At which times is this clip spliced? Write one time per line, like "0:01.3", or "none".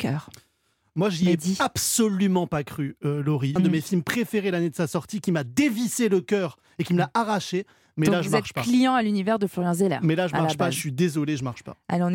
0:03.6